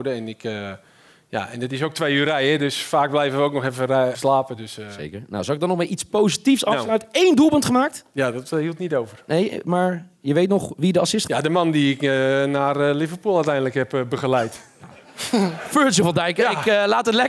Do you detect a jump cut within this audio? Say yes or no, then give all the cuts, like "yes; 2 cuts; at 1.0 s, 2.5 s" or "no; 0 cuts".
yes; 2 cuts; at 4.1 s, 11.3 s